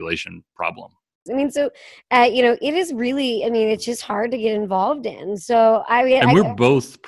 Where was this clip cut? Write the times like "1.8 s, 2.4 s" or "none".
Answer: 1.3 s